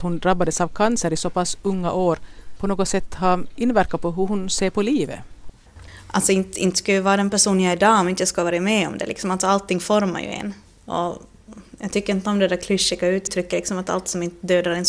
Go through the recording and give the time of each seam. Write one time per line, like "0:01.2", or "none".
none